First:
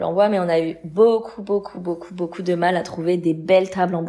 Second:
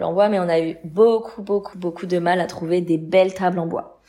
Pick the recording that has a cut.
second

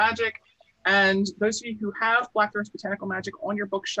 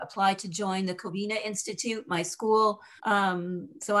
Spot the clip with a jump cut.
second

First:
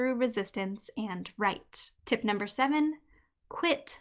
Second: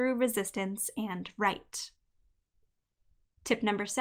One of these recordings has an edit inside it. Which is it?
first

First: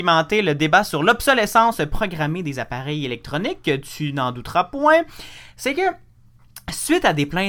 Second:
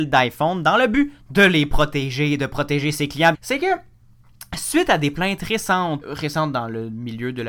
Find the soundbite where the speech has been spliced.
second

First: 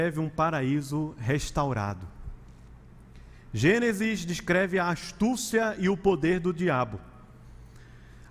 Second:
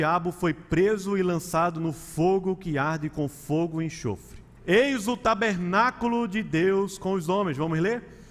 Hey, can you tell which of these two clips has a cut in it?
second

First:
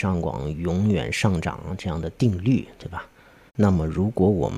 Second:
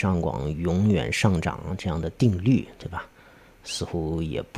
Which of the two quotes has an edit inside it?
first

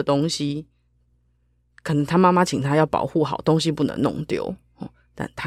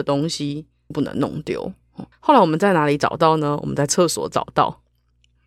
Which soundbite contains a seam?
second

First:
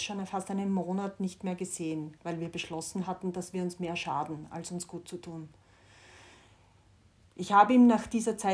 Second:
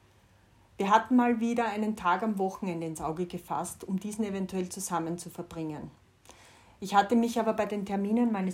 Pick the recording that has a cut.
first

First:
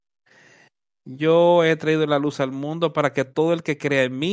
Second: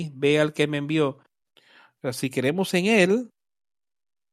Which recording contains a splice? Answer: second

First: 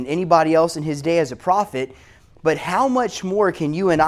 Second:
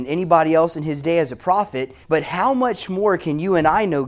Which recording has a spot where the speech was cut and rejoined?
second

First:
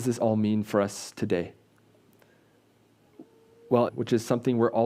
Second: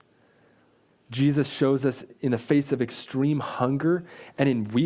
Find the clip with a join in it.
first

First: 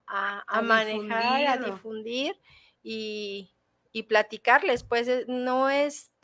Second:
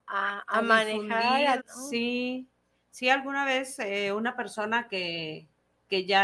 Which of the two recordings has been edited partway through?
second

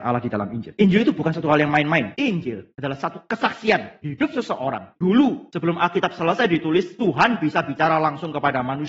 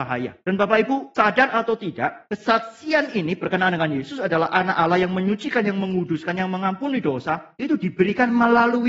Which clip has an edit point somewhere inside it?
first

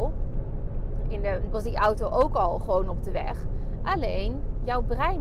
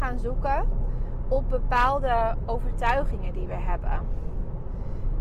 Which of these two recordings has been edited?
first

